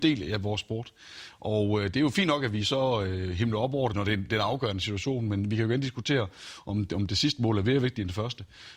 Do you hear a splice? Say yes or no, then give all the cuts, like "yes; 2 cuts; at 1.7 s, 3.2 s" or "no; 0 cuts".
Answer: yes; 1 cut; at 3.9 s